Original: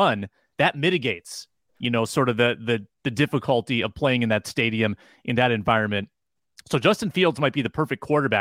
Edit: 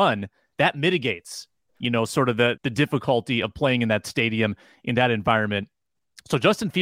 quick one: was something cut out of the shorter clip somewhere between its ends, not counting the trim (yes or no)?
yes